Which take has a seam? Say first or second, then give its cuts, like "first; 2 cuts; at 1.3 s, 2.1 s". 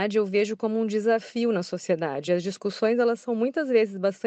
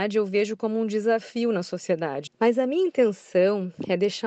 second; 1 cut; at 2.3 s